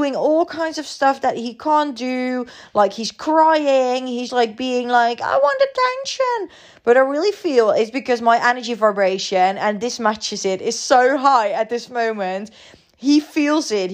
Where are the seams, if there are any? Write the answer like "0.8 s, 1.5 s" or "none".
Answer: 4.3 s